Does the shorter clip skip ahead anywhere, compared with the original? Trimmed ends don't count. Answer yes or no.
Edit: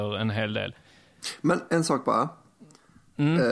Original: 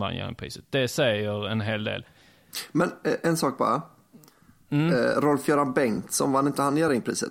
yes